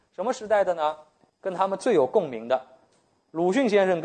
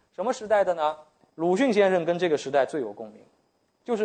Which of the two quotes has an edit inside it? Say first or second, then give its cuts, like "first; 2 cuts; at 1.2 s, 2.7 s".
second; 1 cut; at 1.3 s